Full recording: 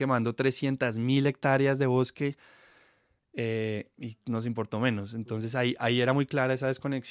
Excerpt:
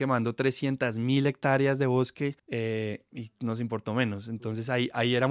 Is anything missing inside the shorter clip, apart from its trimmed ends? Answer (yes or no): yes